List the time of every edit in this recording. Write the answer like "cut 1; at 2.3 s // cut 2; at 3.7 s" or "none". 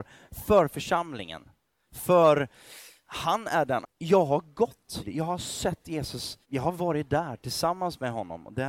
cut 1; at 3.8 s // cut 2; at 5.0 s // cut 3; at 6.4 s